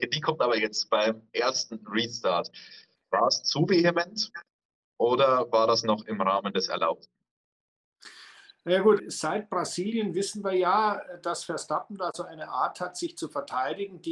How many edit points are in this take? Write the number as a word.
two